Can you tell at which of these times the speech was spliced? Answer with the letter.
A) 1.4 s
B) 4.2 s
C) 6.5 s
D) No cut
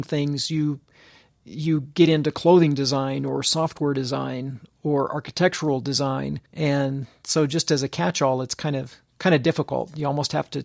C